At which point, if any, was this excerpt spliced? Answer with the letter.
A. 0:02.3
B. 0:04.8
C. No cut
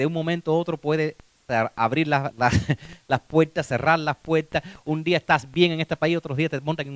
A